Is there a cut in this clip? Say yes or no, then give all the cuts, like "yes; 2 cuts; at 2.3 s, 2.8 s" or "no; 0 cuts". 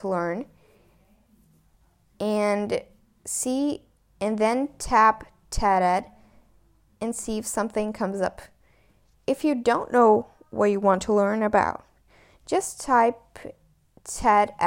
no; 0 cuts